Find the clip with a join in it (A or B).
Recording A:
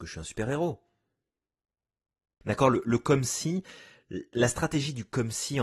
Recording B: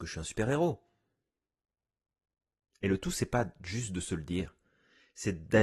A